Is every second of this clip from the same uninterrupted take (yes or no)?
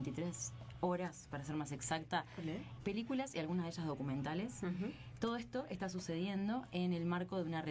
no